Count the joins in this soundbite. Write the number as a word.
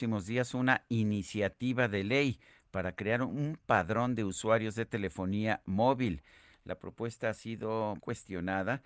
two